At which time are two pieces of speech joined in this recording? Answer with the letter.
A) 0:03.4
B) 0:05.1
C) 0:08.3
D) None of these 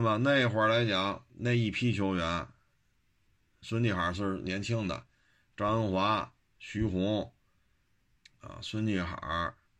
C